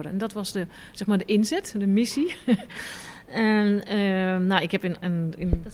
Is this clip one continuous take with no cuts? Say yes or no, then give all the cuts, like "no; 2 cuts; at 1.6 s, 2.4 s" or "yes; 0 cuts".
yes; 0 cuts